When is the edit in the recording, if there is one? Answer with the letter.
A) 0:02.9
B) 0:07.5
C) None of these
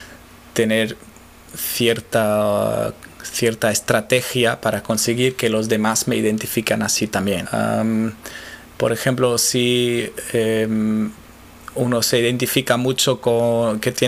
B